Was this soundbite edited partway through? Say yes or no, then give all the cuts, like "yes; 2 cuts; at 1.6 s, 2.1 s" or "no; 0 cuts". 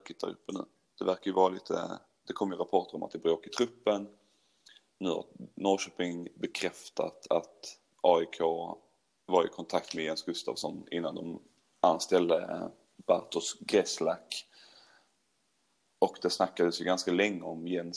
no; 0 cuts